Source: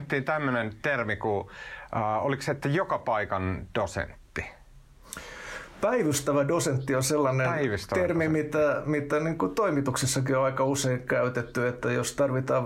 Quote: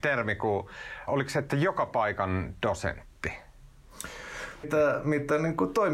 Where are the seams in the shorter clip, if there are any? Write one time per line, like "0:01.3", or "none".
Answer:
0:01.1
0:04.6